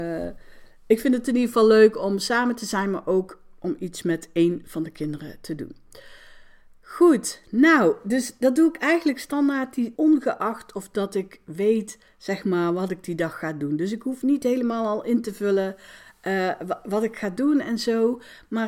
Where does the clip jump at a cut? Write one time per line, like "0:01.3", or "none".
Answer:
0:10.0